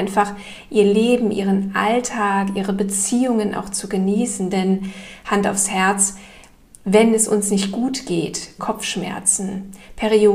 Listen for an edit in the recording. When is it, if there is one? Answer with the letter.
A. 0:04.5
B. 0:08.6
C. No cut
B